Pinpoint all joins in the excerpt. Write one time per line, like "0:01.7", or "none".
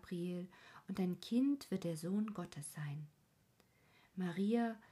none